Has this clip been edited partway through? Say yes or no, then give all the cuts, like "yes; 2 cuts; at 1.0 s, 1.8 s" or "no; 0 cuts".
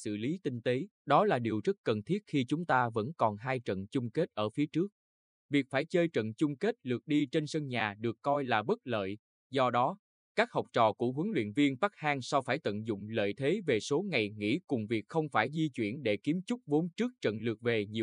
yes; 1 cut; at 0.9 s